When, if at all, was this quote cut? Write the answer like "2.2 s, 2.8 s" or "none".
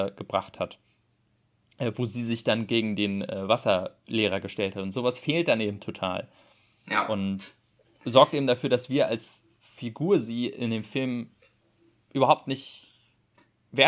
none